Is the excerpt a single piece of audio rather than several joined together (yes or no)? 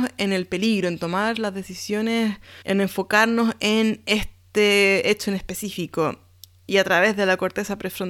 no